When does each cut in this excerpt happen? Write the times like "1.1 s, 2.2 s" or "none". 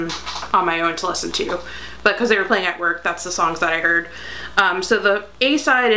none